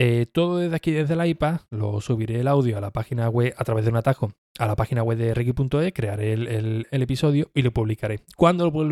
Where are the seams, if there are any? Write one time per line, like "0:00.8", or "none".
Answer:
none